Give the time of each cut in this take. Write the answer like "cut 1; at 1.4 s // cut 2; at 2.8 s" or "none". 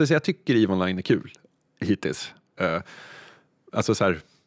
cut 1; at 2.6 s